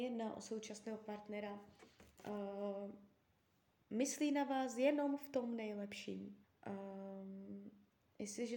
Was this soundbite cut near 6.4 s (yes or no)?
yes